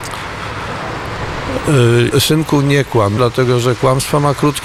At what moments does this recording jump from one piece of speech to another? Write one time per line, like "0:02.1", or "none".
0:02.1
0:03.2